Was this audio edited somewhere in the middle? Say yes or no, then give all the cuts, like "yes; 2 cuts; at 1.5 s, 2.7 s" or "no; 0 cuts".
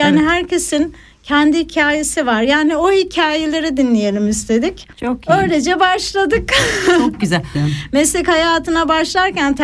yes; 2 cuts; at 4.9 s, 7.5 s